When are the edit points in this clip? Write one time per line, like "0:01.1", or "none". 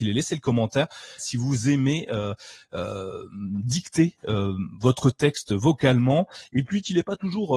0:01.2